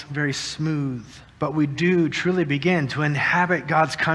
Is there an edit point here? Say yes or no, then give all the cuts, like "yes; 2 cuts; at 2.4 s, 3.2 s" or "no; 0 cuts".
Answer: yes; 1 cut; at 1.3 s